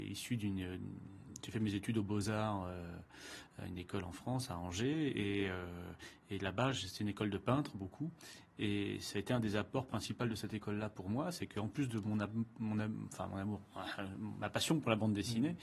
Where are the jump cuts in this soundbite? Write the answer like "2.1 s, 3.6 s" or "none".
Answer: none

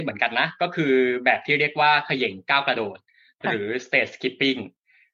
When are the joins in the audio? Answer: none

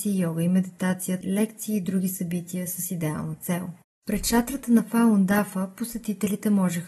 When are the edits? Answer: 1.2 s

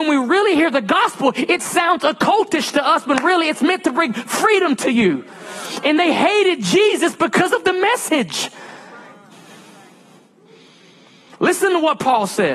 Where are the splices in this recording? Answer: none

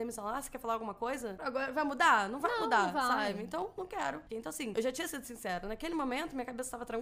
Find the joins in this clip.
1.4 s, 4.3 s

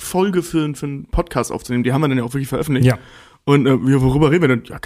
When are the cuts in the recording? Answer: none

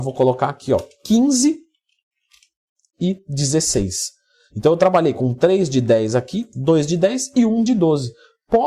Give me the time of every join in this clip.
none

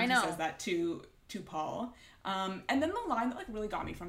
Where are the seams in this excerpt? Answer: none

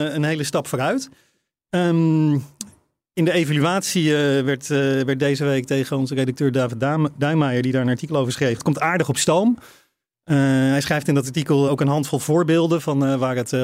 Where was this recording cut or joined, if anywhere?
8.6 s, 11.7 s

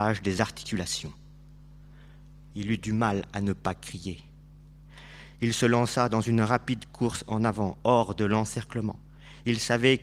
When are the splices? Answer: 2.5 s

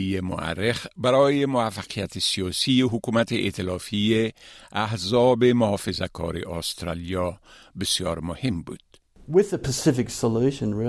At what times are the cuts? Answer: none

